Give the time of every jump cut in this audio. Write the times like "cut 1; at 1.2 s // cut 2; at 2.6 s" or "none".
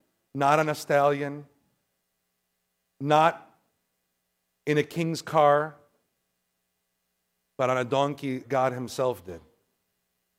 cut 1; at 8.4 s